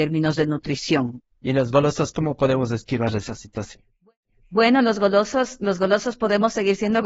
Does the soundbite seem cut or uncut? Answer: uncut